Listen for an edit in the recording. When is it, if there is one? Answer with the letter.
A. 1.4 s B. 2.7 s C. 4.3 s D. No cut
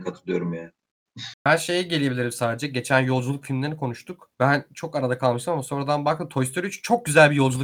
C